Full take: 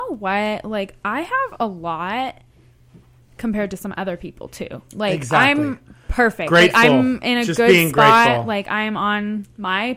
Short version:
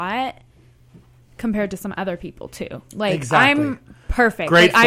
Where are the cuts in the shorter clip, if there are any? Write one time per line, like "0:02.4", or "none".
none